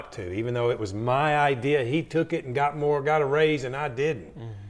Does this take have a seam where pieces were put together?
no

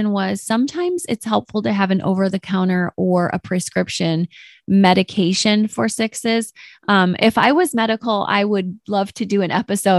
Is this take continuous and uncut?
yes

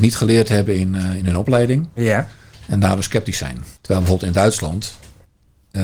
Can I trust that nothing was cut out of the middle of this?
no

